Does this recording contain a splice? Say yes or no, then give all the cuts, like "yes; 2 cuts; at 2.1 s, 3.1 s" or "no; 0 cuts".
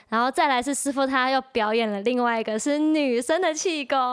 no; 0 cuts